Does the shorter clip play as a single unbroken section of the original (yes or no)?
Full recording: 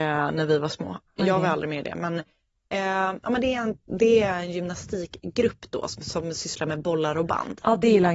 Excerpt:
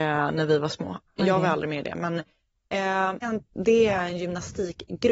no